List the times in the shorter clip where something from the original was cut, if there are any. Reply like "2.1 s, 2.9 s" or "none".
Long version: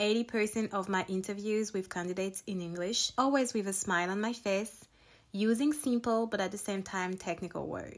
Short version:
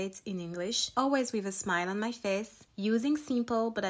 2.7 s